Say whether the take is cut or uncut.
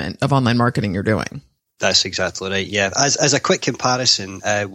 uncut